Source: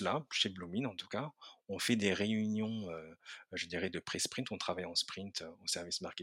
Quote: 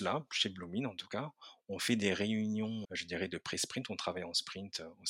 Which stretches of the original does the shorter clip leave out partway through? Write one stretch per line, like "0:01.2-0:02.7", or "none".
0:02.8-0:03.5